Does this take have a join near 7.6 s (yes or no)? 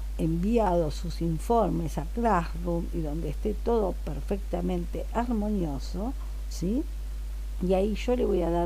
no